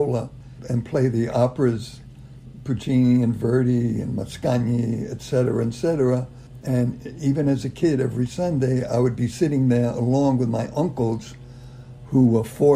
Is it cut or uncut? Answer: uncut